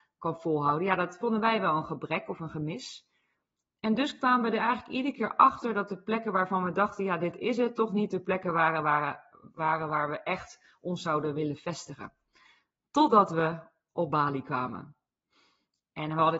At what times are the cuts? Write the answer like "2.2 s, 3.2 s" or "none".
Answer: none